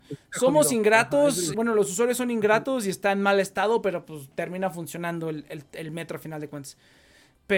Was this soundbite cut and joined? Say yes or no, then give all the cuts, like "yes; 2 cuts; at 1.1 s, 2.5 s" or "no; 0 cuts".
yes; 1 cut; at 1.5 s